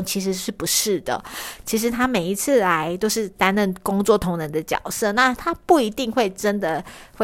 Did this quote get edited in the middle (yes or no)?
no